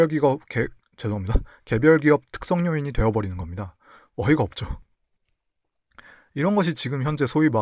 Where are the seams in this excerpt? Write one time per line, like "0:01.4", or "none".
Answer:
none